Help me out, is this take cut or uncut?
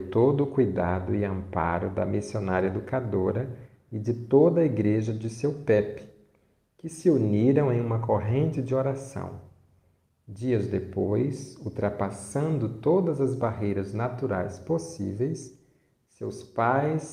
uncut